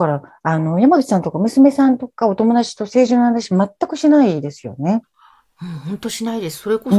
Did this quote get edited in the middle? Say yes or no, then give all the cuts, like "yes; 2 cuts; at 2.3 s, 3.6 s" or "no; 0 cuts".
no; 0 cuts